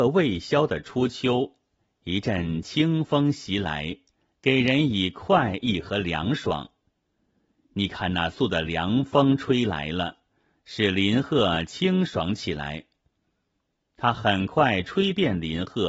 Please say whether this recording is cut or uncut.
cut